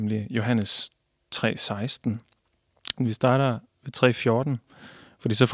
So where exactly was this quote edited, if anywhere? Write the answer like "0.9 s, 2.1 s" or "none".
3.0 s